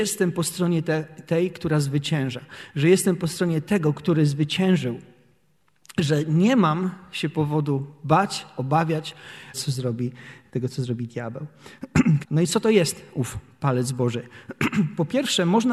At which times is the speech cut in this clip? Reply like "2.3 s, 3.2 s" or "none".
9.5 s, 12.2 s